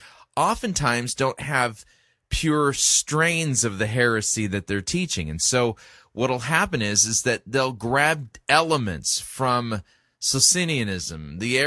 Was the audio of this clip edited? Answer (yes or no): no